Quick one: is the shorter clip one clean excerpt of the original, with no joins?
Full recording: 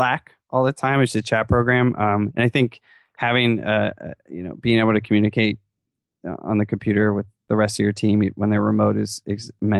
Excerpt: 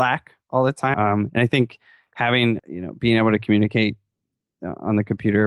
no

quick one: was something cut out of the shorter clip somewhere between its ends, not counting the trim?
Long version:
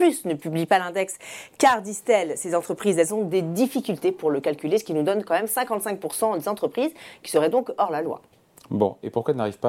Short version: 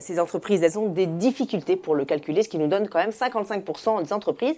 no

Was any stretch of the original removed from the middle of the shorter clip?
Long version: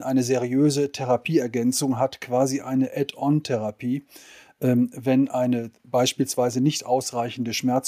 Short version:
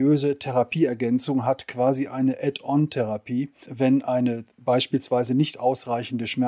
yes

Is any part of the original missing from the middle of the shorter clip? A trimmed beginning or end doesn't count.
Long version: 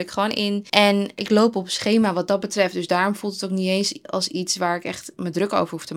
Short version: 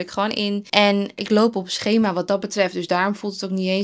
no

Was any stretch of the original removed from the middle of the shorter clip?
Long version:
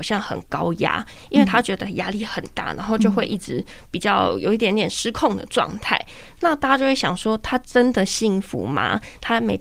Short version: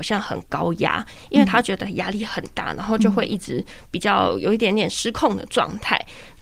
no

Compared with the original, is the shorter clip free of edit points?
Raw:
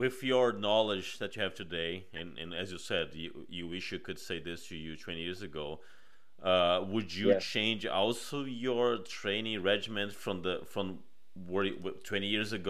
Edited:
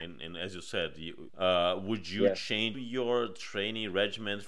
no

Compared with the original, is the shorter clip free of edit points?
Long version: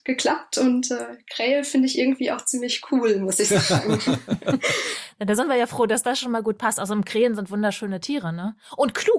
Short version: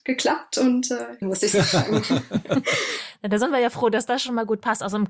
no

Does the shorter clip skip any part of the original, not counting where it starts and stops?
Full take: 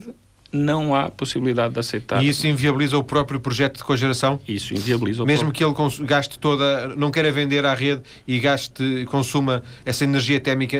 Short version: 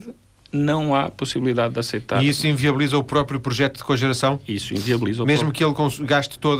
no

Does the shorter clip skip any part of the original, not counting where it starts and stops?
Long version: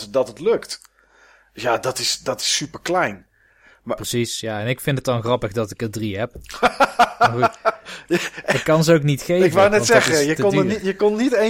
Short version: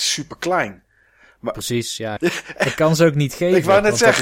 yes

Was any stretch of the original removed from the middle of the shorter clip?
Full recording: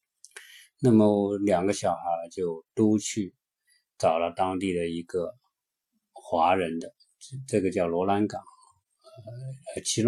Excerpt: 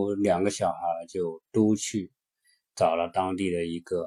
no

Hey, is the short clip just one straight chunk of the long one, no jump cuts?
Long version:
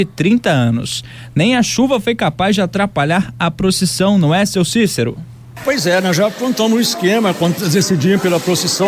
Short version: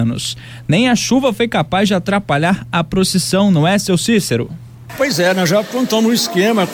yes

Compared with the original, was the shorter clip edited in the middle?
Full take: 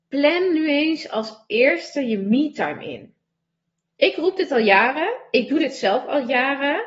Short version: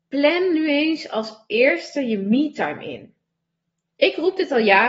no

